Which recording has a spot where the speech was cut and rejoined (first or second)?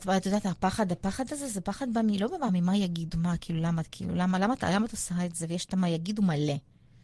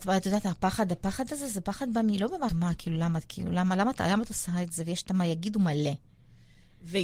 second